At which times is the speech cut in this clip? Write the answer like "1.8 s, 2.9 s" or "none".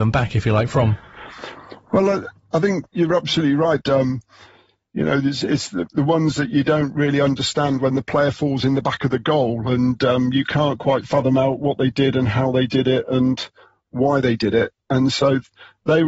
3.8 s